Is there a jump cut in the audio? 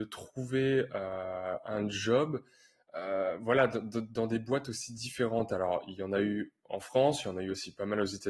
no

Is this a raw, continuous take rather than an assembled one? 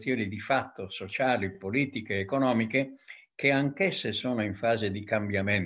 yes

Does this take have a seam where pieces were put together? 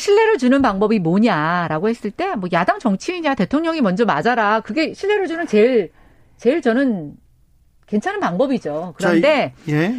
no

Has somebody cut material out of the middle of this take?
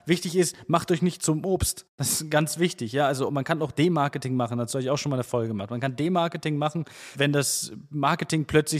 yes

